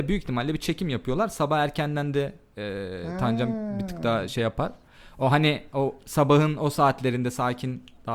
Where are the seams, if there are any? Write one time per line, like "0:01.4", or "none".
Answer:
none